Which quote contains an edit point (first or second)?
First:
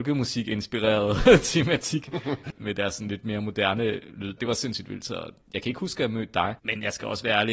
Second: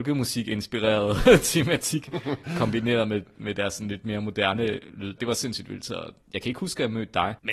first